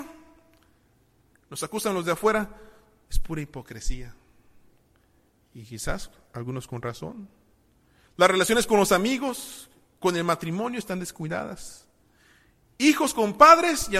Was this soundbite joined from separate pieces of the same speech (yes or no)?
no